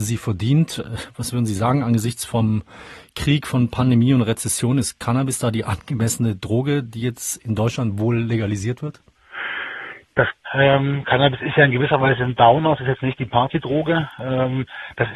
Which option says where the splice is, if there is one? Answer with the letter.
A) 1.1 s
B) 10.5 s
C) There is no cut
B